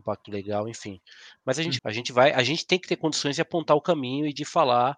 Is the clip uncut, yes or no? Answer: no